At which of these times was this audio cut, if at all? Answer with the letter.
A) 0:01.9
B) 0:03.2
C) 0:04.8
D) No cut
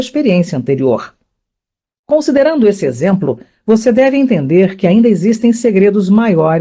D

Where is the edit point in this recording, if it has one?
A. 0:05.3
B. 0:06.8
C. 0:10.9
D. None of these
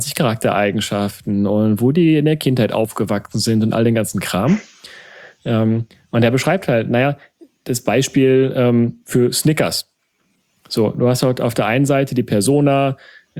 D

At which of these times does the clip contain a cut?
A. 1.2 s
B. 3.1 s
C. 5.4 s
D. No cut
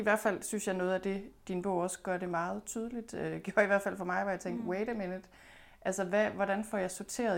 D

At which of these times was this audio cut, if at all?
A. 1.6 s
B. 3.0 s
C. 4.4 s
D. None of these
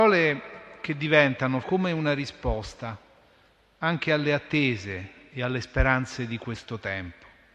A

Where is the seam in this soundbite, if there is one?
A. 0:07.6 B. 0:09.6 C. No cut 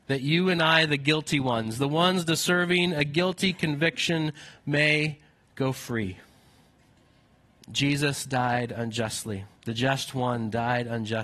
B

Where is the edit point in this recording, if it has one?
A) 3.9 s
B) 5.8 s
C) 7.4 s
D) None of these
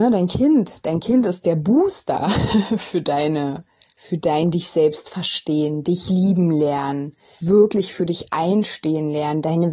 C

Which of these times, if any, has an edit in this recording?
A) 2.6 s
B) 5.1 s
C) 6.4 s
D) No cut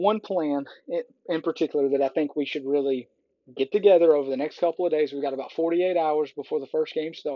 D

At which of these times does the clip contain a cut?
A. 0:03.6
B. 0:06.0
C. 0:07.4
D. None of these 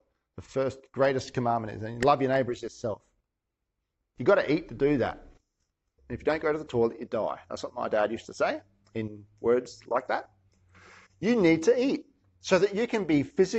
B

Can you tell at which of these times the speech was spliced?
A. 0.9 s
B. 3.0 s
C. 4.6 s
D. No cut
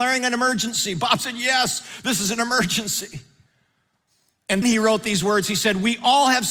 C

